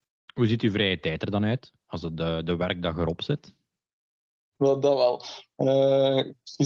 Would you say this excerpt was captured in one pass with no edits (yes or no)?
no